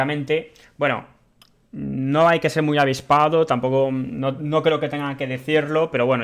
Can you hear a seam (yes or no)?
no